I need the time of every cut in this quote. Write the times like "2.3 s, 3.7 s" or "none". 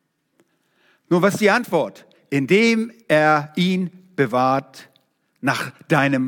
none